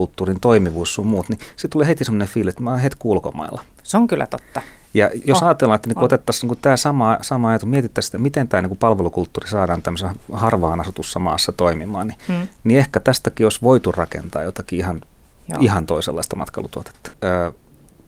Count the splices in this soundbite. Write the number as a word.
one